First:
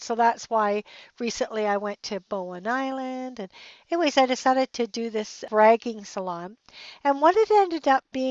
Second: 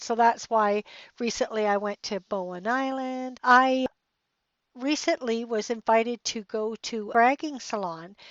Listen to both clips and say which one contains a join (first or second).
second